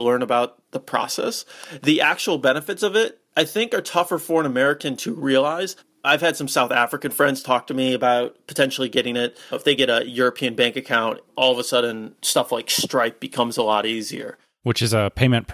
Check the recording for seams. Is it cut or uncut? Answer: uncut